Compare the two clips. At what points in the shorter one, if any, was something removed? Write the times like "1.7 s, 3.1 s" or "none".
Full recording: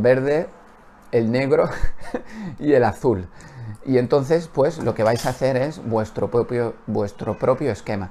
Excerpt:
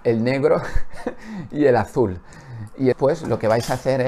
2.9 s